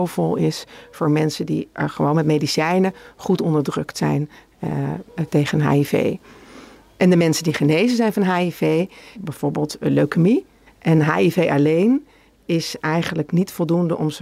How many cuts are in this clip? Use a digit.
2